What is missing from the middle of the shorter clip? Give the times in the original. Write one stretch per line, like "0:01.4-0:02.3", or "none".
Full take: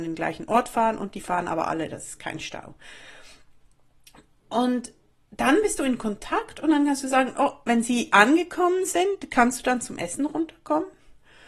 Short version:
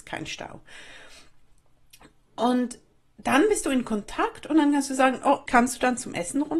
0:07.6-0:09.3